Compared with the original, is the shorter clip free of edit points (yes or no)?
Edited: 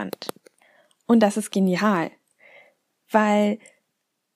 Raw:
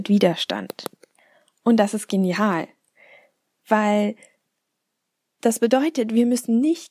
yes